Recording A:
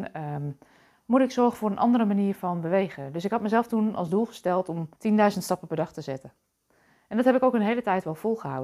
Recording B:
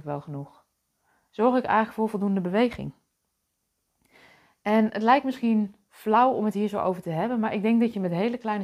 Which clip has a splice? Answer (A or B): A